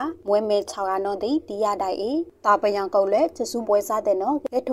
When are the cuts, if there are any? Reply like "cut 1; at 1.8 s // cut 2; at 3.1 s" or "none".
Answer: cut 1; at 3.6 s